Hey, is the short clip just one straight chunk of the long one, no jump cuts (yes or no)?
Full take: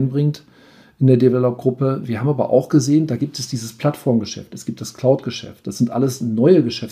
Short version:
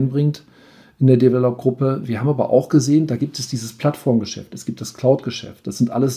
yes